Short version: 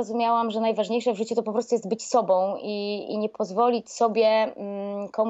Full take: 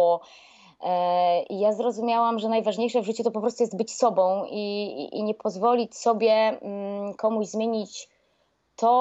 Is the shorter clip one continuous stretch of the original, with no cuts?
no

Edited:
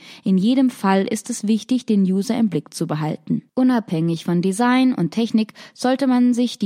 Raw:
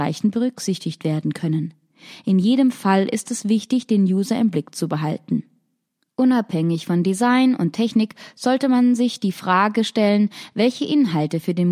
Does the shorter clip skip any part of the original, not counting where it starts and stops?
yes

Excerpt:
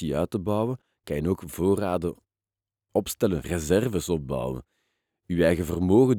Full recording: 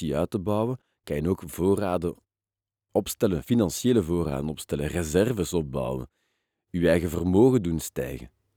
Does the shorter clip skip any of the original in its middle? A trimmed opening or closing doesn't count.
yes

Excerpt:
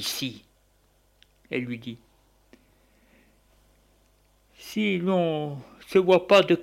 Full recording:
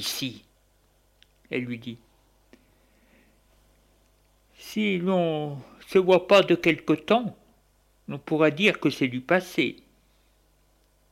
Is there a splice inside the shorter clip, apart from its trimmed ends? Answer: no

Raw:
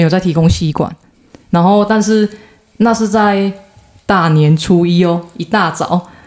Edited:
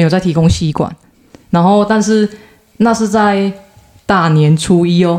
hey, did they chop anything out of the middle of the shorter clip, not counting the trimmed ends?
no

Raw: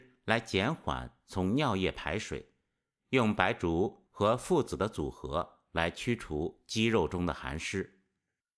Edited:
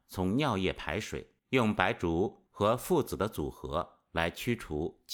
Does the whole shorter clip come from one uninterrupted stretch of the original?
no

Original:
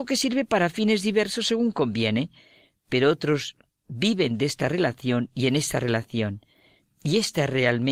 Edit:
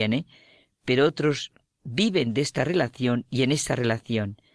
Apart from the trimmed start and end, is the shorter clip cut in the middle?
no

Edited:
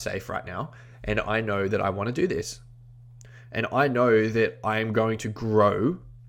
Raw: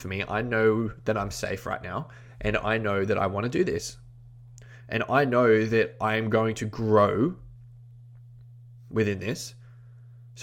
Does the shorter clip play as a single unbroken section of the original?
yes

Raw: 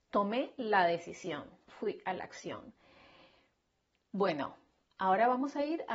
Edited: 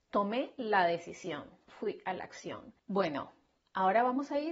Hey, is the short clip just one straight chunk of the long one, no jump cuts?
no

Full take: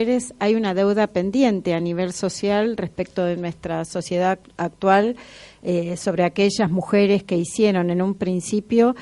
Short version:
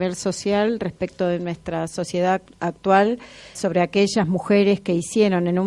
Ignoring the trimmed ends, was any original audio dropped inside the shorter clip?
yes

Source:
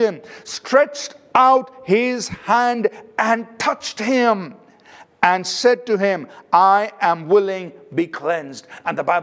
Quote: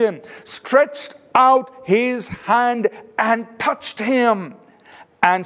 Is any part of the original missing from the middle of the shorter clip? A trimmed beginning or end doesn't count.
no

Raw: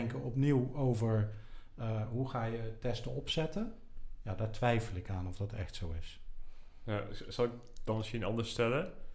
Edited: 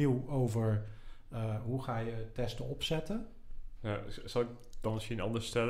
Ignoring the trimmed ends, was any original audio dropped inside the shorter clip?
yes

